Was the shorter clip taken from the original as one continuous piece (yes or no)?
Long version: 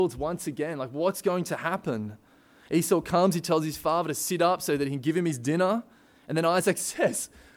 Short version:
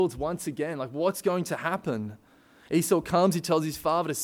yes